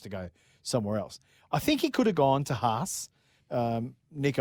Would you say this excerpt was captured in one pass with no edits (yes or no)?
no